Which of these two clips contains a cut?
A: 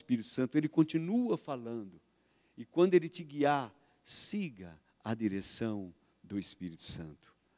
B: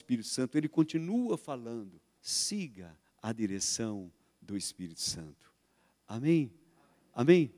B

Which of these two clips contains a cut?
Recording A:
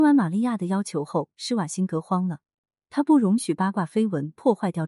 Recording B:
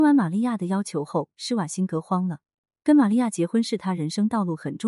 A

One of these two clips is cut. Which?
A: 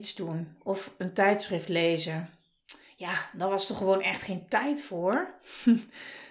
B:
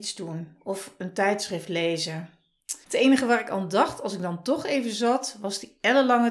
B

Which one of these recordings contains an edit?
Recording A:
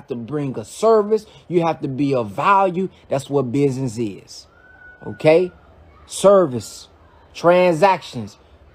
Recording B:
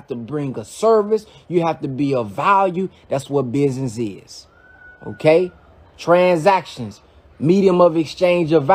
B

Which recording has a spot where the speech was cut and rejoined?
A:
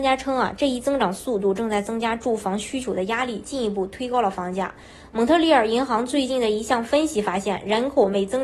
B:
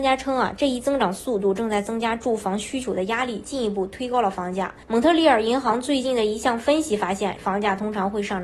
B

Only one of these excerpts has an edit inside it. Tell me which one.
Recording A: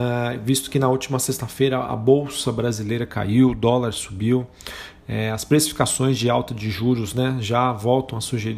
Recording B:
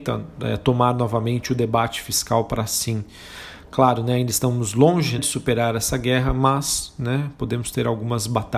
B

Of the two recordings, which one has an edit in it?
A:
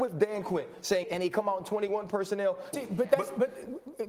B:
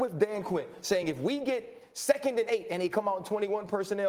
A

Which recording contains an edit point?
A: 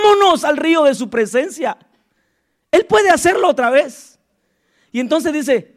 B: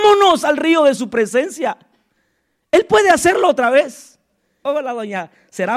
B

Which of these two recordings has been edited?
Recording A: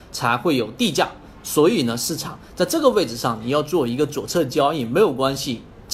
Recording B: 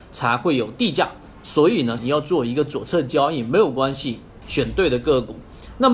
B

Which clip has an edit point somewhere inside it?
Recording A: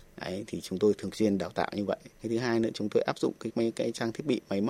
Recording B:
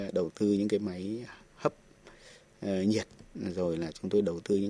A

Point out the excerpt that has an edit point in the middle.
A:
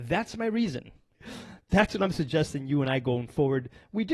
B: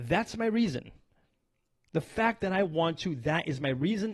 A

